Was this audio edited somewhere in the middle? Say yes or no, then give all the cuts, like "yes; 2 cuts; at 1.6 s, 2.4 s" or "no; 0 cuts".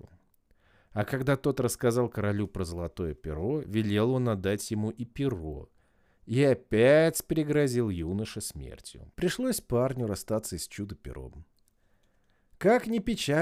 yes; 2 cuts; at 3.6 s, 9.1 s